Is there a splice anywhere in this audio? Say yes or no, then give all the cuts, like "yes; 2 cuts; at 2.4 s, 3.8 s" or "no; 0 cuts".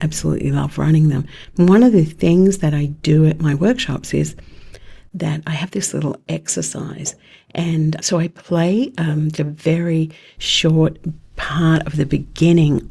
yes; 2 cuts; at 8.0 s, 9.3 s